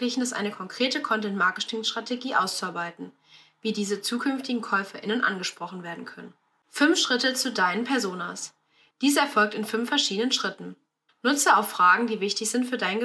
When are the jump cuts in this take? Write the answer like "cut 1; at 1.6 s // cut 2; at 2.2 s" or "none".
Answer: cut 1; at 8.9 s // cut 2; at 11.1 s